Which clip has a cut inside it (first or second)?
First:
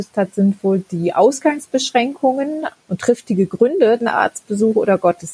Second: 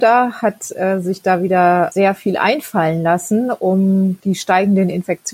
first